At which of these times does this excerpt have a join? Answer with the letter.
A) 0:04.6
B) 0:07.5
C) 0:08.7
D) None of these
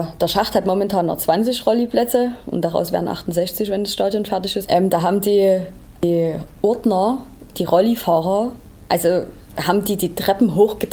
A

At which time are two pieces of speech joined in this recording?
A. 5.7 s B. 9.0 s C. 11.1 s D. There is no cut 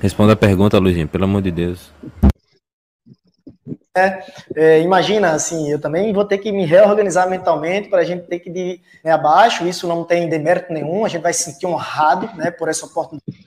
B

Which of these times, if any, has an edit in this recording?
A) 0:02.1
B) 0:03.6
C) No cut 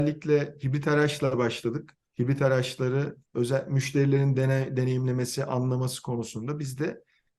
A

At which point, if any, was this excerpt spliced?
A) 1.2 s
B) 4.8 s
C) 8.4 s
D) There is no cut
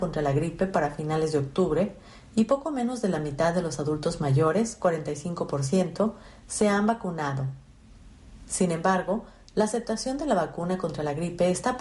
C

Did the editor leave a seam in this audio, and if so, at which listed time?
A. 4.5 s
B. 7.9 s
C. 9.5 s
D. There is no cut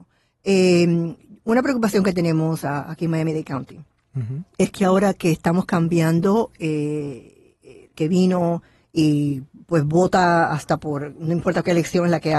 B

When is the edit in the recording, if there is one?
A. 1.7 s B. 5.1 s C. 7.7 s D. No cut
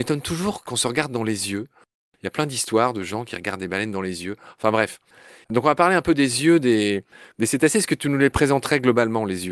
D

